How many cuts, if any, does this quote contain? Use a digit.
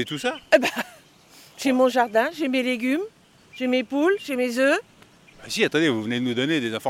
1